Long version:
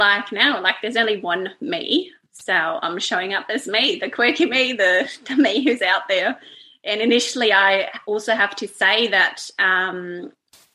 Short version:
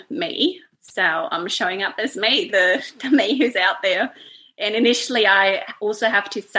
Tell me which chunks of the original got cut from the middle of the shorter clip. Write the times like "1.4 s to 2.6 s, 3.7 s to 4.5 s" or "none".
4.0 s to 4.8 s